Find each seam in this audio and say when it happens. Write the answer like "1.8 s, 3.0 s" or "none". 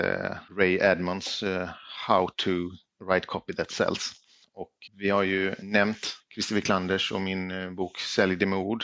4.9 s